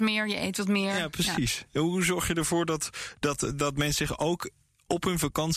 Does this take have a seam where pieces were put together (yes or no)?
no